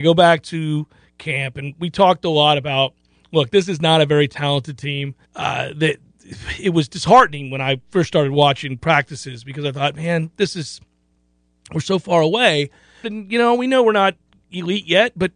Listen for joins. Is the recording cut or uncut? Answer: cut